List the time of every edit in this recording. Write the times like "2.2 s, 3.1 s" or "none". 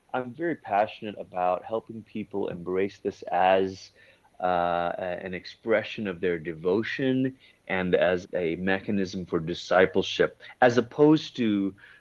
8.2 s

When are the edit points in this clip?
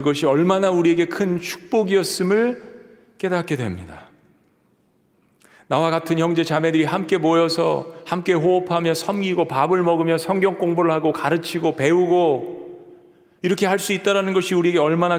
none

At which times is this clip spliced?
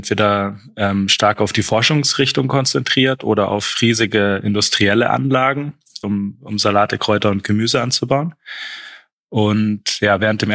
6.0 s, 9.1 s

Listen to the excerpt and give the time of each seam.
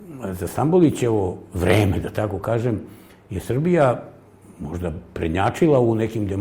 none

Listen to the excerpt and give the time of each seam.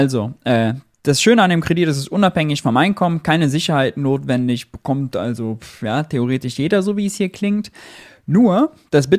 none

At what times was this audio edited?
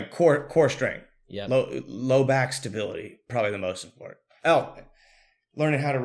none

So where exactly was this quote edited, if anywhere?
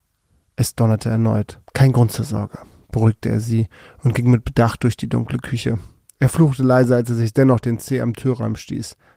1.7 s

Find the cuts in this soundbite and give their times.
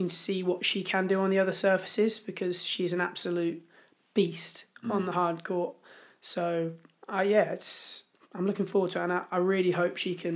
none

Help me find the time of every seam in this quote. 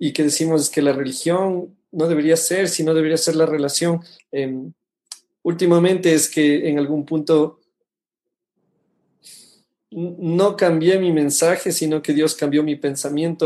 4.2 s

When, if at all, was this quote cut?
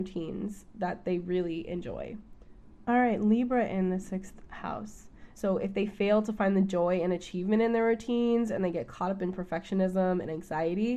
5.3 s

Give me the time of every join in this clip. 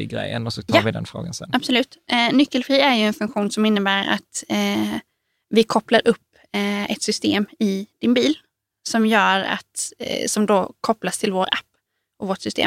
none

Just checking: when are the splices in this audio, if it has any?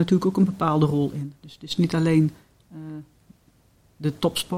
none

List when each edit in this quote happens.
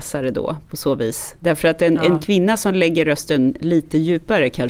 1.4 s

